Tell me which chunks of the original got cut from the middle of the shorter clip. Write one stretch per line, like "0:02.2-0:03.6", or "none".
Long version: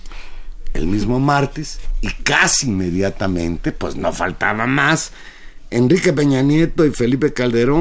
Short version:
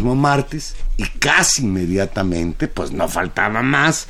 none

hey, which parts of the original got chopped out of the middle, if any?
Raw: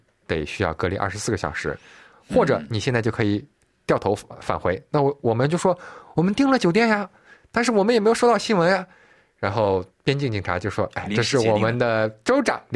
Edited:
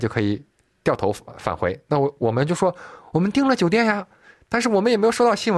none

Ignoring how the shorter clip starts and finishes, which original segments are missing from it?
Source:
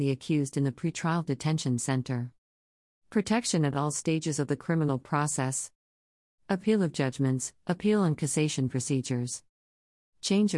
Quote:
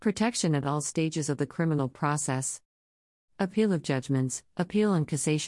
none

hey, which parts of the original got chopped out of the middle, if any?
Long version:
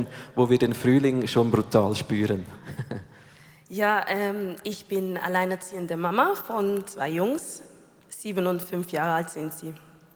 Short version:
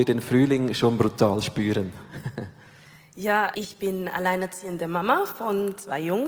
0:04.0-0:04.6

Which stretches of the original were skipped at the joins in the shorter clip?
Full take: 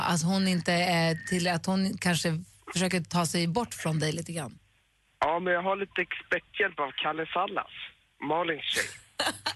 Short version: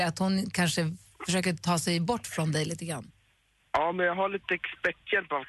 none

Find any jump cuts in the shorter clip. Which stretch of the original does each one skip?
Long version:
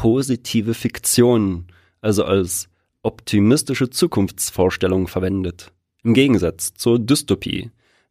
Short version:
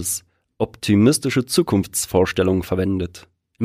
none

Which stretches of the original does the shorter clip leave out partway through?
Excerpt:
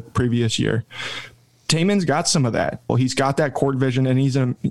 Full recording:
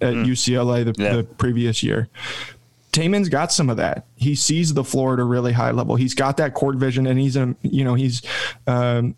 0:04.1-0:05.9

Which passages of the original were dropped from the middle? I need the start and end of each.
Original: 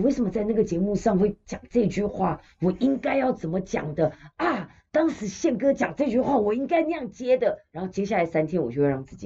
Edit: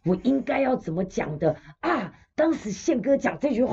none

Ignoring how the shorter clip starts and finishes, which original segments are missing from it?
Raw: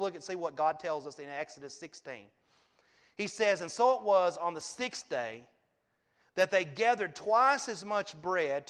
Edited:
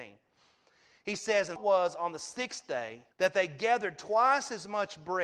0:03.7-0:04.0
0:05.5-0:06.3

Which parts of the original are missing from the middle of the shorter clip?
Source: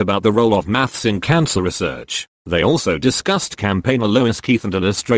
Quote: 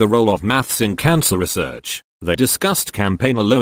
0:02.6-0:03.0

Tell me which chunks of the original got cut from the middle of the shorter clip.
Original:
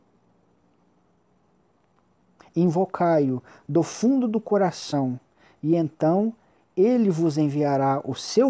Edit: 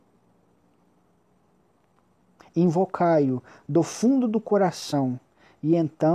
none

